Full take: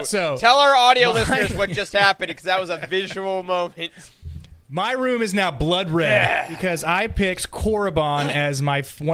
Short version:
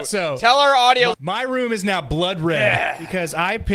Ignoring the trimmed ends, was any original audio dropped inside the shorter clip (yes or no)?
yes